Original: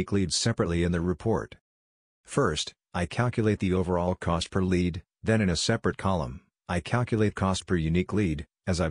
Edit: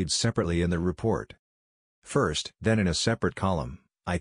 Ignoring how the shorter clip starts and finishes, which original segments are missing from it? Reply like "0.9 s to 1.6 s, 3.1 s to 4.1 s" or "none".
2.8 s to 5.2 s